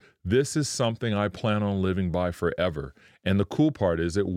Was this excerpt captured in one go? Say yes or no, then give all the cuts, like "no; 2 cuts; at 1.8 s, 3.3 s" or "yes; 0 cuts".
yes; 0 cuts